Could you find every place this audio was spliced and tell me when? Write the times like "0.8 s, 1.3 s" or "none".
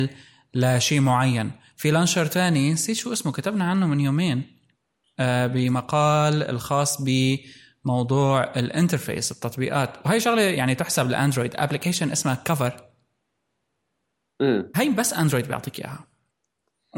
14.7 s